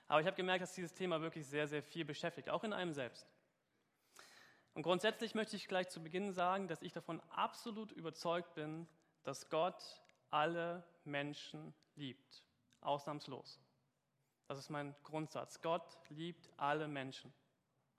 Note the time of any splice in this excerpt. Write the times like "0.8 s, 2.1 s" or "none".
none